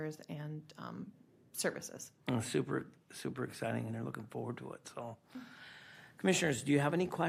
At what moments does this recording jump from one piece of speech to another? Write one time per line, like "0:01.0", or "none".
0:02.2
0:03.9